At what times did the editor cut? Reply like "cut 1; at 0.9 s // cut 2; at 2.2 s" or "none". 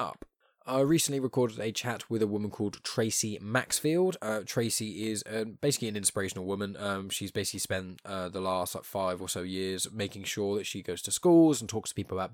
none